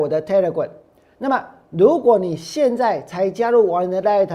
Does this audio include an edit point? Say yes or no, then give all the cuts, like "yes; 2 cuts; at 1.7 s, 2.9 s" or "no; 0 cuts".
no; 0 cuts